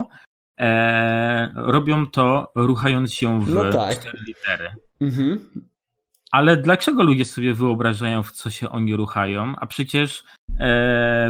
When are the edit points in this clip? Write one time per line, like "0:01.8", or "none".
none